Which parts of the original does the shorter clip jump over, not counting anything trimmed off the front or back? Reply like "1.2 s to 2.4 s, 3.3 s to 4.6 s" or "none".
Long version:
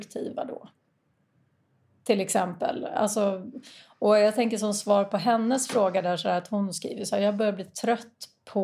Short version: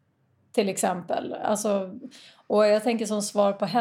none